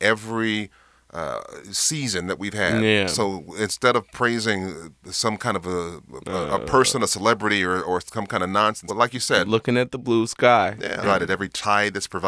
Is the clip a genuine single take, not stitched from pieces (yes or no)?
no